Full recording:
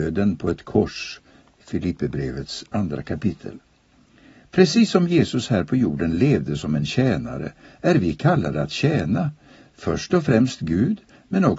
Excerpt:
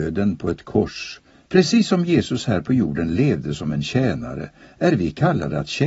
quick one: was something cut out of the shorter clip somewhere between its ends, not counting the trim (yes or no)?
yes